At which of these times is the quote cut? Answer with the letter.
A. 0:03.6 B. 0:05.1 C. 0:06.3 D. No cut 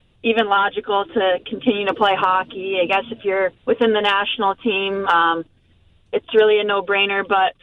A